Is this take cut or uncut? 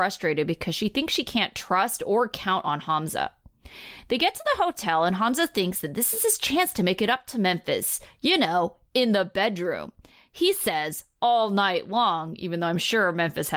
uncut